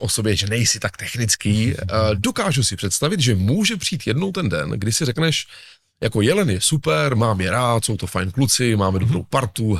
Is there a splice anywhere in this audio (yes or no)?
no